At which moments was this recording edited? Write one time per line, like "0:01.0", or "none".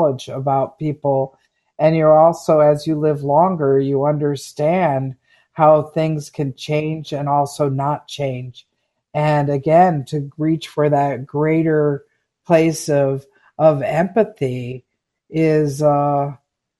none